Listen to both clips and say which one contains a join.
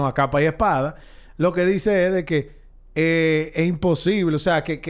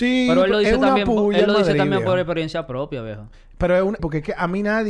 second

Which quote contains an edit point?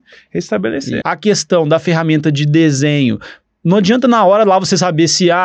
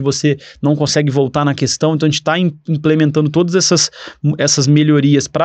first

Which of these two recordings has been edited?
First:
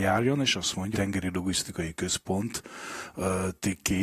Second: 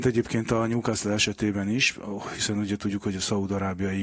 first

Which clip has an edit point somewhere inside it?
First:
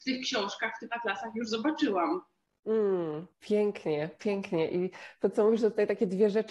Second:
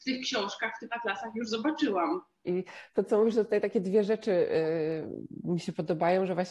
second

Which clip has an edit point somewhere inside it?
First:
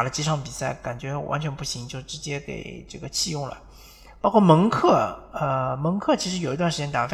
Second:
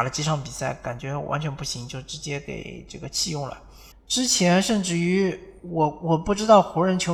second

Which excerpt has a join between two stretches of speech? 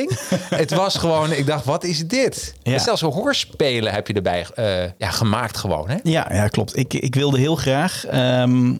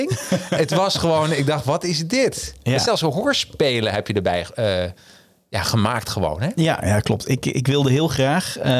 first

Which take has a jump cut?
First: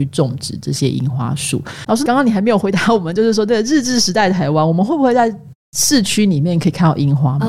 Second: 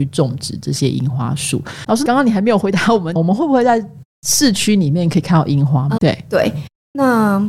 second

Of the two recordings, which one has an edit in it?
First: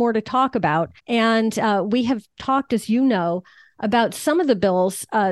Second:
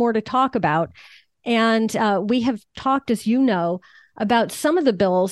first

